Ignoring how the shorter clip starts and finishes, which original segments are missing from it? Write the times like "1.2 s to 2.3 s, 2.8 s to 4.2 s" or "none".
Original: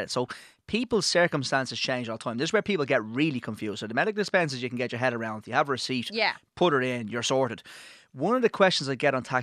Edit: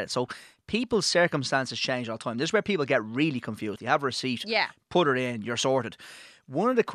3.8 s to 5.4 s